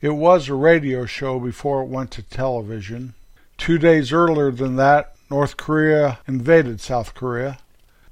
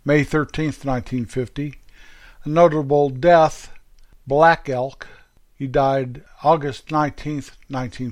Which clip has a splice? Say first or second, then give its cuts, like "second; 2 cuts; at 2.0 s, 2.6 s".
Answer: first; 1 cut; at 3.4 s